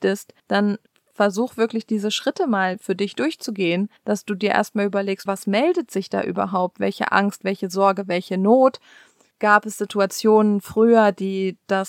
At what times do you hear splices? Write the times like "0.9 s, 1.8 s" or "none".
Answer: 5.3 s

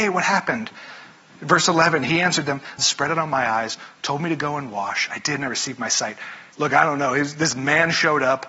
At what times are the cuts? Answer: 2.8 s, 6.5 s

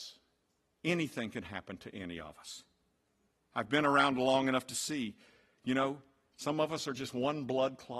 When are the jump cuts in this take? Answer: none

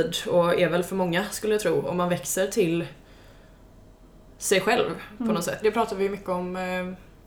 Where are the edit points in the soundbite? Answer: 5.6 s

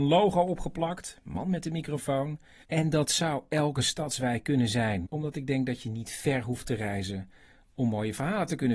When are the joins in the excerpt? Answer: 2.6 s, 5.1 s

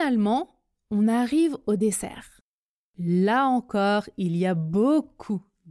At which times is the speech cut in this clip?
none

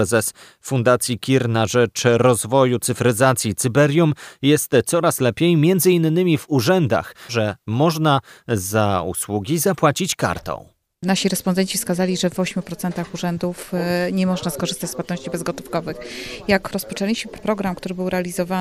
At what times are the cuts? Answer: 7.3 s

